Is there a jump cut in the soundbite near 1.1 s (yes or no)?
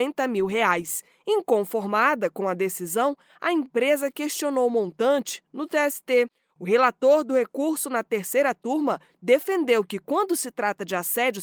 no